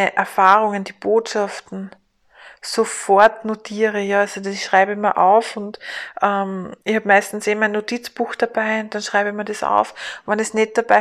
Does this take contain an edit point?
yes; 1 cut; at 6.8 s

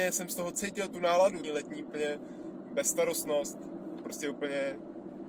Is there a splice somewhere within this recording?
yes; 2 cuts; at 1.4 s, 4.0 s

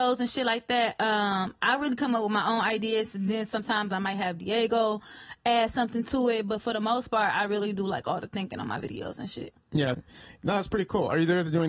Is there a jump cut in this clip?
yes; 1 cut; at 9.9 s

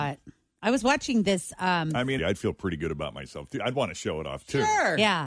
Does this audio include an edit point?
yes; 1 cut; at 2.2 s

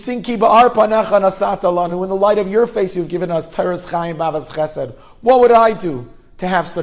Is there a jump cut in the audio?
no; 0 cuts

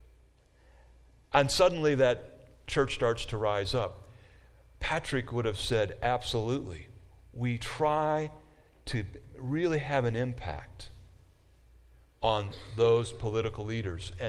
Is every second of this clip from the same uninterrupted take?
yes; 0 cuts

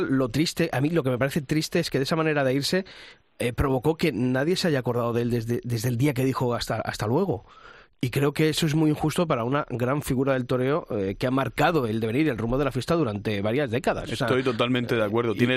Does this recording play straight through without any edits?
yes; 0 cuts

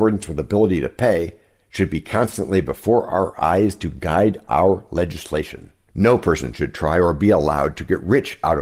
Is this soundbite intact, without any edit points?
no; 1 cut; at 5.9 s

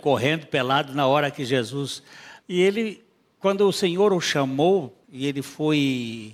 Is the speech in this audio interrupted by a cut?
yes; 2 cuts; at 2.4 s, 5.0 s

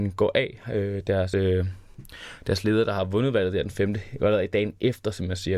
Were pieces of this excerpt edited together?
no; 0 cuts

